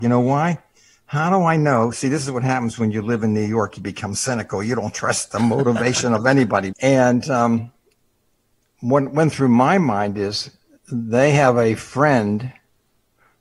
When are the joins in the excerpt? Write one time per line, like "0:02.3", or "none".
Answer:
0:06.7